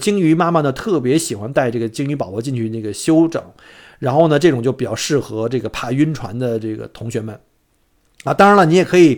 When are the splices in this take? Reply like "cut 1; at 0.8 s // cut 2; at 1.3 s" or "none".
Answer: none